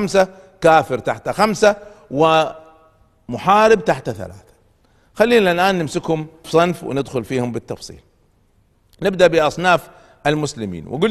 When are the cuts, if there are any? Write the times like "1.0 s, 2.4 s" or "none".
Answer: 6.4 s